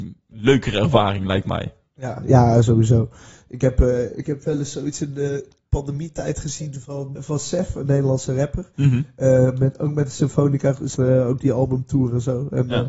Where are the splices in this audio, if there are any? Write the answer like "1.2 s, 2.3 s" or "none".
7.2 s, 11.0 s